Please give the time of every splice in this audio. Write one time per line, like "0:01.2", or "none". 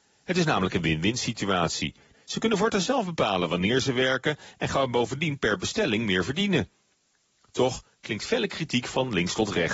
0:02.1